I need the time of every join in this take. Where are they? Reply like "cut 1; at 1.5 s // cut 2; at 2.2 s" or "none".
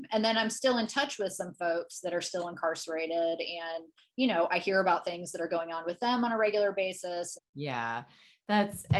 cut 1; at 7.3 s